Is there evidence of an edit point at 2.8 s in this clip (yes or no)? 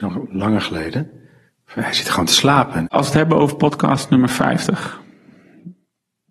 yes